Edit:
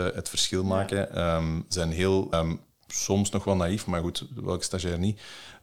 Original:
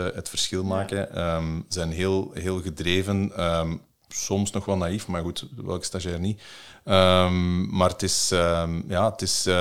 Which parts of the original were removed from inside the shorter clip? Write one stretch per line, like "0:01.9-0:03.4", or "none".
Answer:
0:02.3-0:03.5